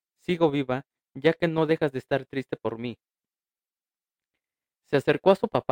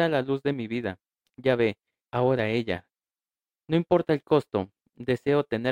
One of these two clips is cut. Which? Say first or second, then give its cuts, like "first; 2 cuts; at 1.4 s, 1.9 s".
second; 1 cut; at 2.0 s